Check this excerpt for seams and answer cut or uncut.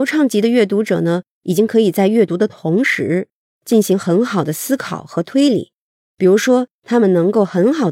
uncut